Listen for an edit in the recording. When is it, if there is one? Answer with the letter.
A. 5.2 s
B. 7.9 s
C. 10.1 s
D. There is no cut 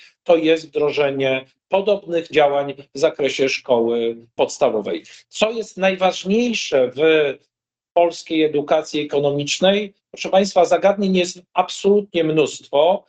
D